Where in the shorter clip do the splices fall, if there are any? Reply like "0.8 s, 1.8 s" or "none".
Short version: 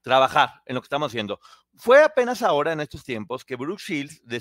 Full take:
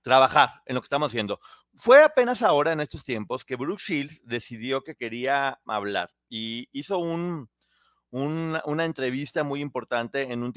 none